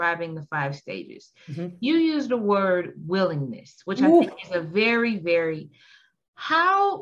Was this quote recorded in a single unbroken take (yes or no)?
no